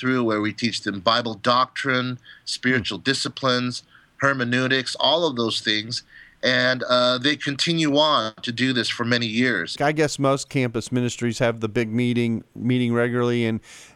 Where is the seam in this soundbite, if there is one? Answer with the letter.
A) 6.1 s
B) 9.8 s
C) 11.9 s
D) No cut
B